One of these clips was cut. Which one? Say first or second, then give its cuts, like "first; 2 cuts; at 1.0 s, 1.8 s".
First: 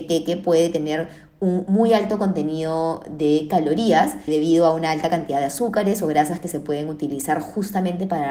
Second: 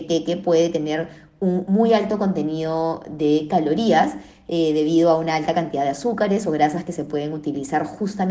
first; 1 cut; at 4.3 s